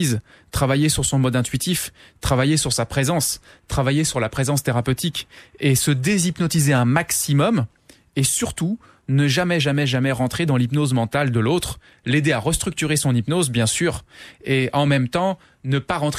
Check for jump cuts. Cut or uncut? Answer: uncut